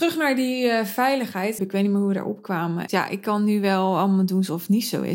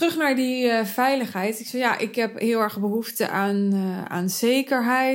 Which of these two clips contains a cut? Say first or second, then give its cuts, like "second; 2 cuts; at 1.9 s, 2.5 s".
first; 2 cuts; at 1.6 s, 2.9 s